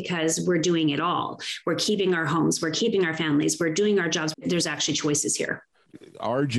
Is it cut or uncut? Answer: cut